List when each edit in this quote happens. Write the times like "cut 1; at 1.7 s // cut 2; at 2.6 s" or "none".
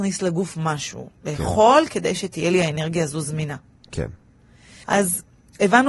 cut 1; at 4.8 s